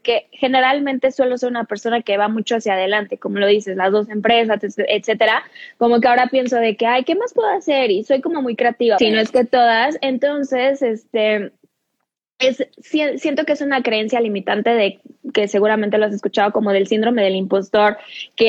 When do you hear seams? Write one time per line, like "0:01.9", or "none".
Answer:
0:09.0